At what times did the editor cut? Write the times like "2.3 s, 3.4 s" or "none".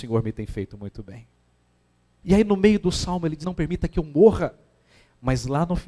2.2 s, 3.4 s